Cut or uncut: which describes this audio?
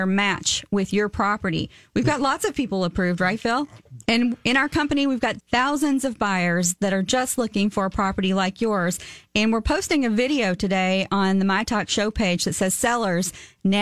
cut